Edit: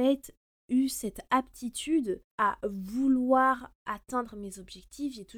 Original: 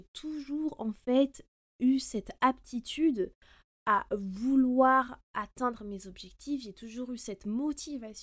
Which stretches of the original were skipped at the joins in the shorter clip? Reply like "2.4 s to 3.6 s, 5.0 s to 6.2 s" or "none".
3.4 s to 3.8 s